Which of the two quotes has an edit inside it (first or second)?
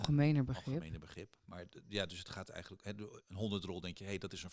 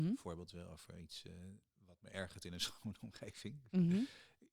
first